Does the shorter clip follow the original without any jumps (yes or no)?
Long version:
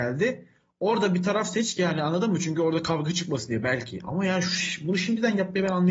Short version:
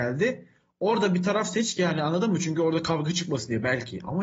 yes